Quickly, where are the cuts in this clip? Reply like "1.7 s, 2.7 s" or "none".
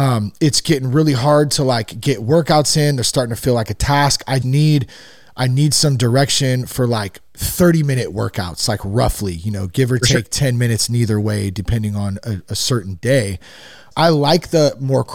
4.4 s, 13.9 s